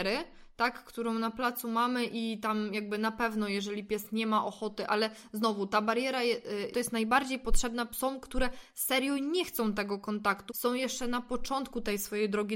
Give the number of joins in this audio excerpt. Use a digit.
2